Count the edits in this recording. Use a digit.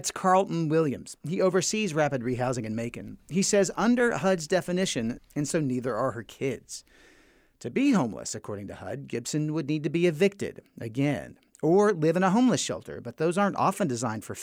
1